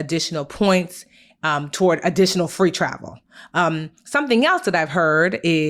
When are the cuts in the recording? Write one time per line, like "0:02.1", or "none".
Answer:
none